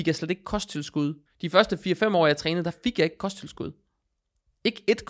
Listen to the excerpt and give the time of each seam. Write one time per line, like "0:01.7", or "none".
0:01.3